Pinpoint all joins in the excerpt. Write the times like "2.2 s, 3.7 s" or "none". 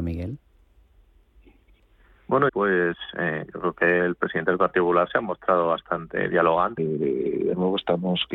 2.5 s, 6.8 s